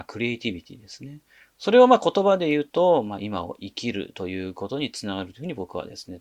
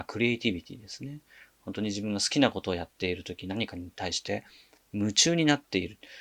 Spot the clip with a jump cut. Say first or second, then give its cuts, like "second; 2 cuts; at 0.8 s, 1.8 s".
first; 1 cut; at 1.5 s